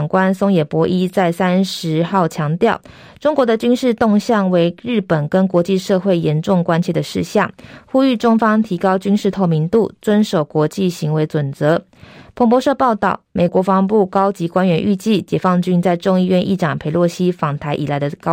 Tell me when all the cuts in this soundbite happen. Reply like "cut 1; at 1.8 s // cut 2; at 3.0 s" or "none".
cut 1; at 13.5 s